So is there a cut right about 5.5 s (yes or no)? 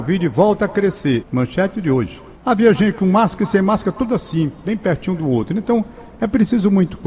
no